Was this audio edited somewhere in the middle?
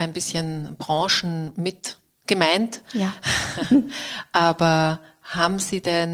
no; 0 cuts

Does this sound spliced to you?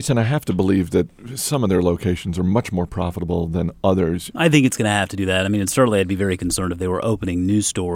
yes; 1 cut; at 4.3 s

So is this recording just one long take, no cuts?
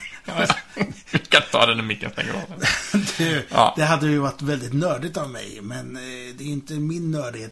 yes; 0 cuts

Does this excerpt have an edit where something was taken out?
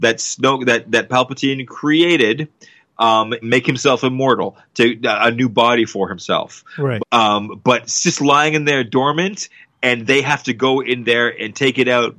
yes; 2 cuts; at 3.4 s, 7.0 s

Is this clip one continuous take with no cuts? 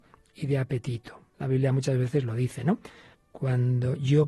no; 2 cuts; at 1.3 s, 3.1 s

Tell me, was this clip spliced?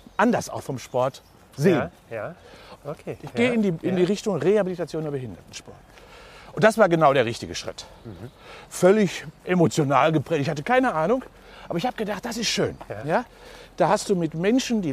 yes; 1 cut; at 2.8 s

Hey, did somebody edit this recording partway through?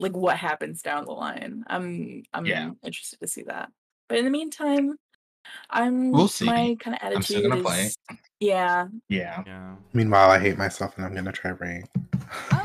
yes; 1 cut; at 9.0 s

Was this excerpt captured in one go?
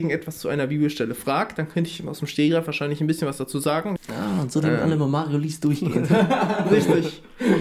no; 1 cut; at 4.0 s

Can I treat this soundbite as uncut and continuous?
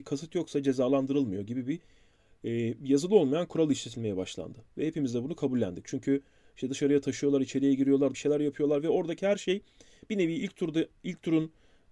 no; 1 cut; at 8.1 s

